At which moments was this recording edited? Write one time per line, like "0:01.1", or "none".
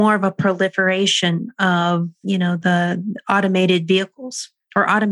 0:02.2

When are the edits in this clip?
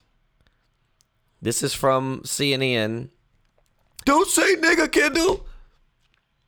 0:04.0

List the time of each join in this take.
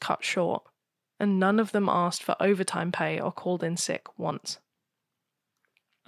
none

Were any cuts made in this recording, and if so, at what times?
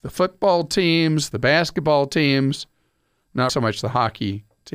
0:01.3
0:03.5

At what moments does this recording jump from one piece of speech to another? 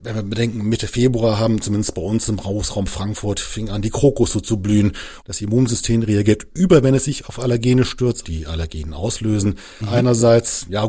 0:05.2
0:08.2
0:09.8

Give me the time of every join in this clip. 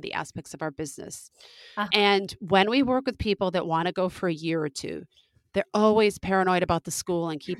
none

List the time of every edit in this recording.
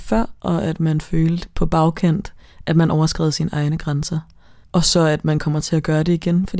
0:04.6

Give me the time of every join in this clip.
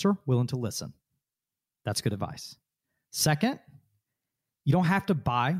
none

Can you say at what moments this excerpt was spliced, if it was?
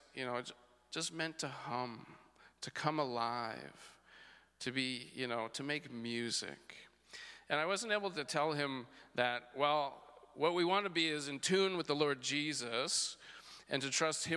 none

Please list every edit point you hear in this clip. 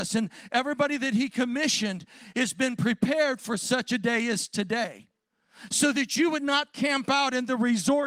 none

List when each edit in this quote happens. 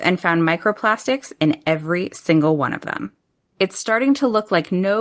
0:03.5

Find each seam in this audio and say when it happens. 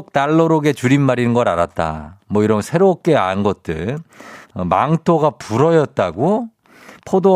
0:04.4

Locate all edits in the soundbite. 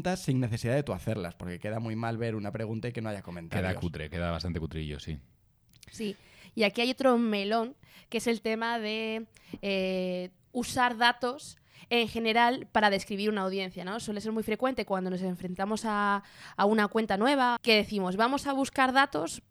0:17.6

